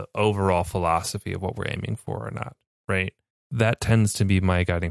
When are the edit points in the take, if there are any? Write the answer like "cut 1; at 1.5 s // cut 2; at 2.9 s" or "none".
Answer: cut 1; at 2.8 s

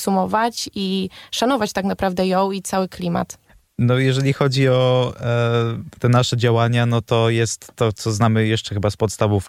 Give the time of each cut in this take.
none

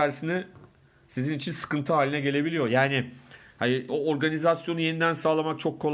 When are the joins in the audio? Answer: cut 1; at 2.7 s // cut 2; at 3.9 s

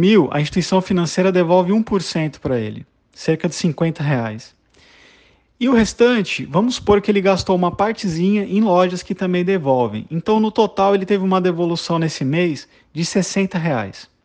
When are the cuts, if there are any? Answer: none

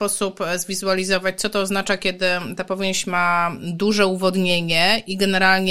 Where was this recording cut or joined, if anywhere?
none

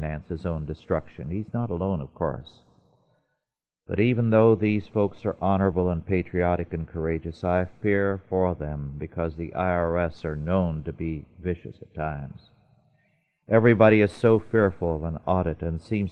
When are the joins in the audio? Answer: none

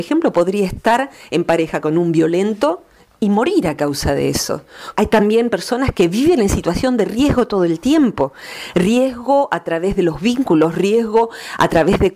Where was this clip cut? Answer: cut 1; at 4.9 s

